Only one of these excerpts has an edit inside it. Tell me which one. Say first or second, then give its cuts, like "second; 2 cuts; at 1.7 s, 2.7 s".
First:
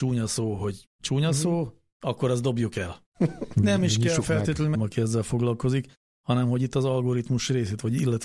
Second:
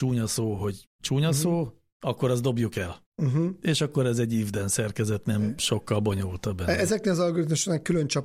first; 2 cuts; at 3.1 s, 4.7 s